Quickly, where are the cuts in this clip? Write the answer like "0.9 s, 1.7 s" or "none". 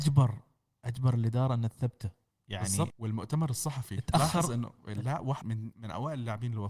2.9 s, 5.4 s

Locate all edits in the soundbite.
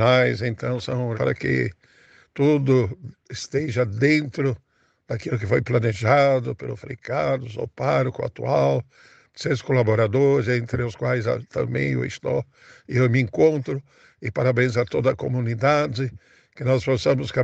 1.1 s

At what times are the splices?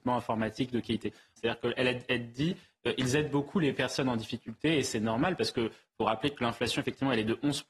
1.4 s

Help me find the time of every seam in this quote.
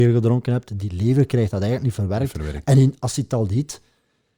none

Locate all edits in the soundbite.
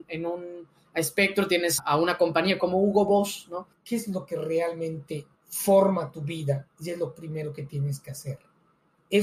1.8 s, 3.7 s, 5.4 s

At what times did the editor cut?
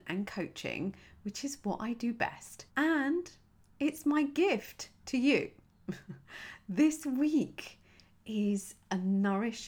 2.7 s

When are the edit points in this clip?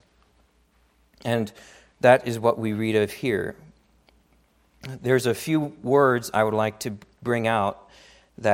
none

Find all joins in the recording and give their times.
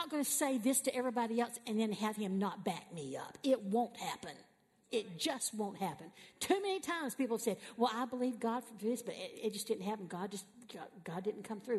none

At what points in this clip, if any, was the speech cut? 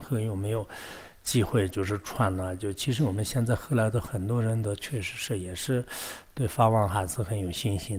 none

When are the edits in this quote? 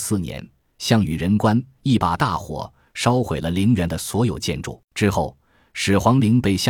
4.8 s

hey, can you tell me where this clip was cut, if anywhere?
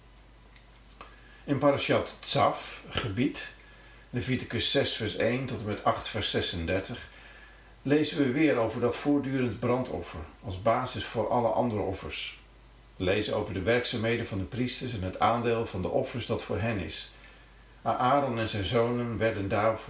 none

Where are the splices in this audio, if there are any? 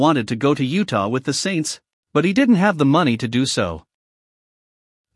none

